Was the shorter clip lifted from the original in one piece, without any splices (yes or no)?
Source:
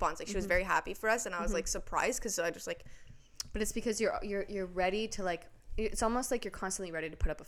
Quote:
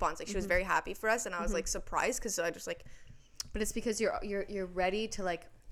yes